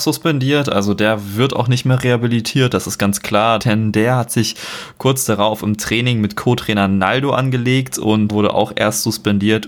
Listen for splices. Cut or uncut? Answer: cut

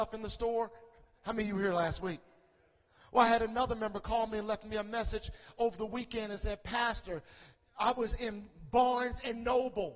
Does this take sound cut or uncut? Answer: uncut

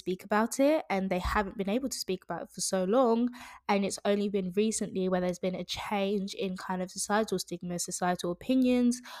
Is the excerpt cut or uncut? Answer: uncut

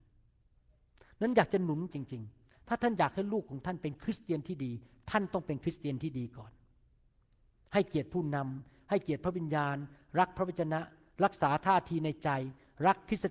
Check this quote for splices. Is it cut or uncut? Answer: cut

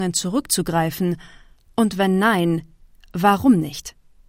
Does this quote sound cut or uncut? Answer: uncut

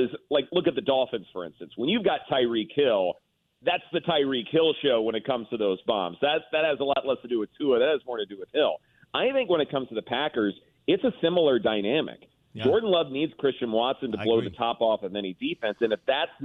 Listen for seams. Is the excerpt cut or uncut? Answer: uncut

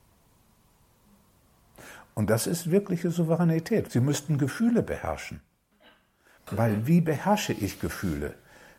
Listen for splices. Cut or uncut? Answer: cut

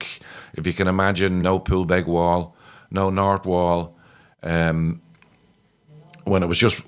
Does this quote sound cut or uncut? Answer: cut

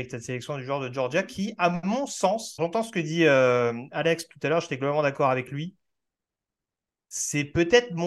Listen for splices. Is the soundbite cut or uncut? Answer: cut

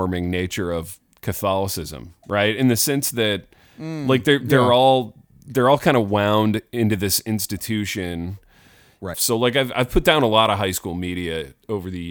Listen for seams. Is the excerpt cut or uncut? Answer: cut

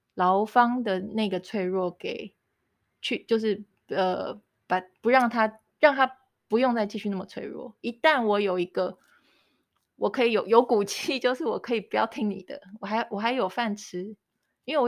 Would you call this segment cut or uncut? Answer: uncut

